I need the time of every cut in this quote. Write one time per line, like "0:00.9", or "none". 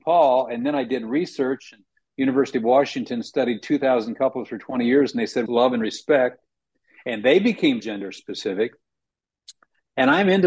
0:05.5
0:07.8